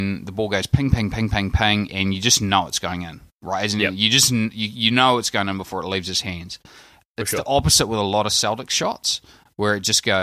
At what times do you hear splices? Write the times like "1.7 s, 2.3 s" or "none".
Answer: 1.9 s